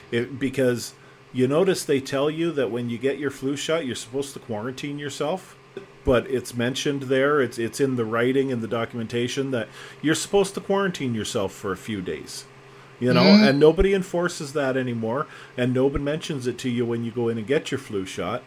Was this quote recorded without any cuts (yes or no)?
no